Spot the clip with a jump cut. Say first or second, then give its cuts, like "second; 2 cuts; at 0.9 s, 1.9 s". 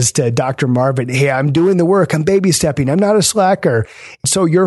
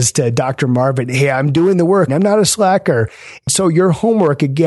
second; 1 cut; at 2.1 s